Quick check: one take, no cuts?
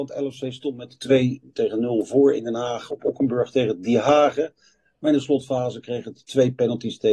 yes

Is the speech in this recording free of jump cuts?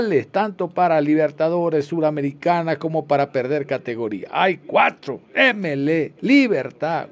no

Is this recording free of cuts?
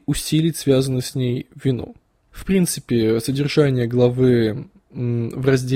no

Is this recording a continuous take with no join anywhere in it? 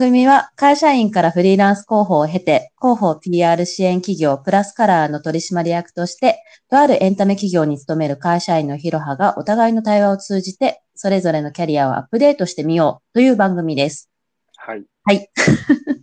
no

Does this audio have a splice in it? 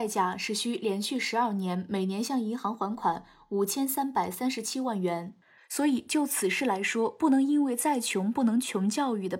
yes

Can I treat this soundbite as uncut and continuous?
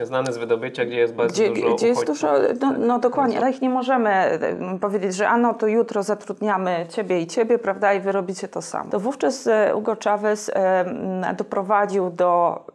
no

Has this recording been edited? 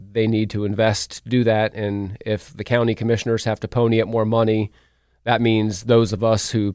no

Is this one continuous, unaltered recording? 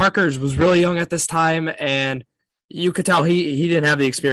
yes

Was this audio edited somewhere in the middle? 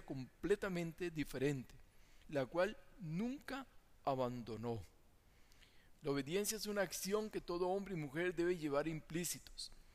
yes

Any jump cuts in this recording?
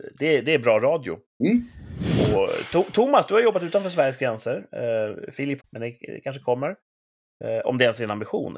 yes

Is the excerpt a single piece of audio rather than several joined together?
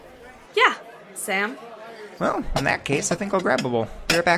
no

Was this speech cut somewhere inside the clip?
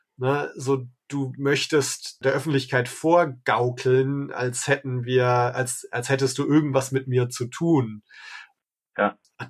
no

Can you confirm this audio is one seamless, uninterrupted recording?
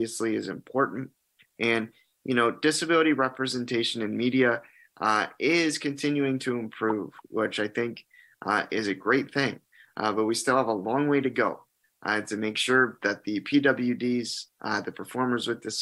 yes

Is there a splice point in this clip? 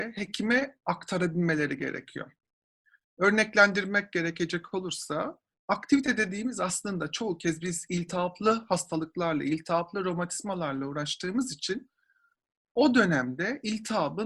no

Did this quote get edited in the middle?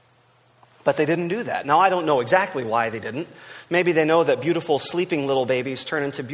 no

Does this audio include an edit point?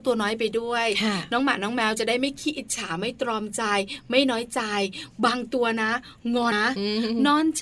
yes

